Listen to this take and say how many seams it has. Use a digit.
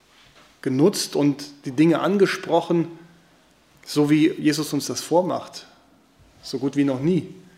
0